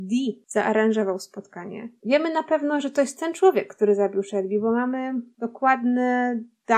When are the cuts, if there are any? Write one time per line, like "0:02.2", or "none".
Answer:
0:02.0